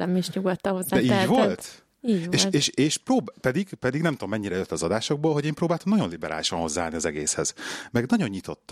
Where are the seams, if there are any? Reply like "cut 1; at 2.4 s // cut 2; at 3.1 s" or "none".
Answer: none